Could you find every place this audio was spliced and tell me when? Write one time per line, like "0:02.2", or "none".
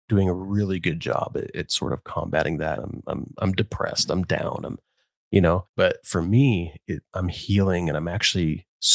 0:02.8